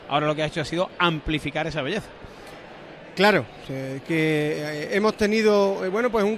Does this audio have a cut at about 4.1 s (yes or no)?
yes